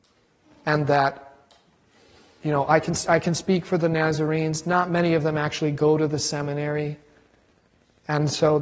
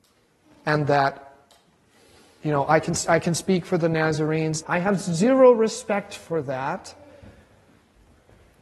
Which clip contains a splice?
second; 1 cut; at 4.6 s

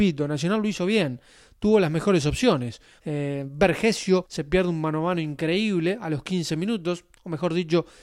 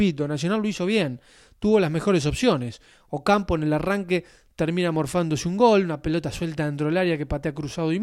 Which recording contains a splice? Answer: first; 2 cuts; at 3.0 s, 4.2 s

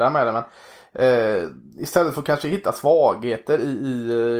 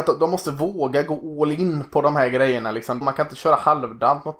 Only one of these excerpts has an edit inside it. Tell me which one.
second; 1 cut; at 3.0 s

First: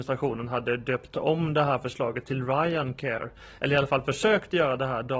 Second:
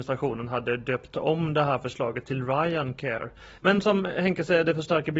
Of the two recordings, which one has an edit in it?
second; 1 cut; at 3.6 s

